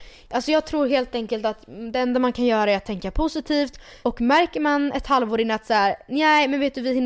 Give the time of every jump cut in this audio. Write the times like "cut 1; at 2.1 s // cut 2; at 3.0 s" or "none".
cut 1; at 4.0 s